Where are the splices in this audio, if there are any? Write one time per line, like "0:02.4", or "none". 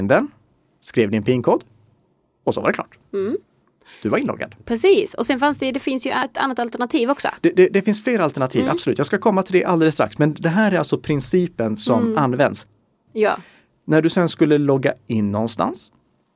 0:13.1